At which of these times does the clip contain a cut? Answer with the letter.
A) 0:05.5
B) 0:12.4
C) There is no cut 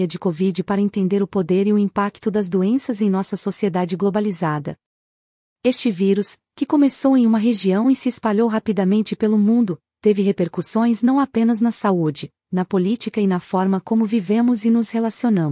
B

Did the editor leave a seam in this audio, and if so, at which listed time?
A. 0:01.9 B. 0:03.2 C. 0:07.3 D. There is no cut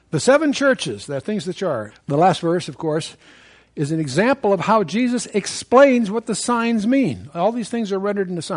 A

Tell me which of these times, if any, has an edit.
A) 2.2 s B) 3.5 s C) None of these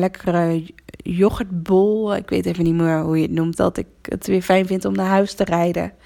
B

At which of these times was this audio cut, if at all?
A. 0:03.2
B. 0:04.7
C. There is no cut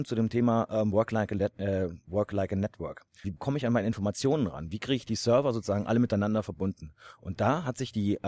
A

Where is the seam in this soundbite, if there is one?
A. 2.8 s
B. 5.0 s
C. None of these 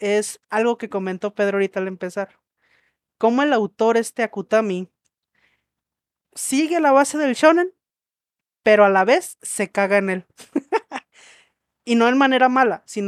C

